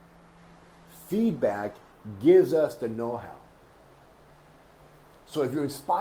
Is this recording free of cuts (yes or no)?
yes